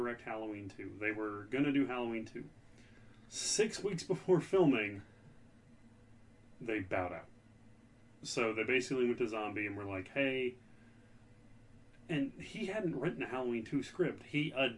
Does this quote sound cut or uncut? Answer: uncut